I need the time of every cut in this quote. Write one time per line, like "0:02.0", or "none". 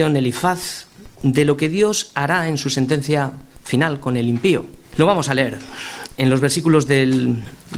0:04.8